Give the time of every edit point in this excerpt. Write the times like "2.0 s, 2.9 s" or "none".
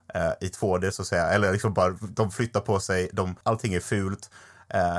3.4 s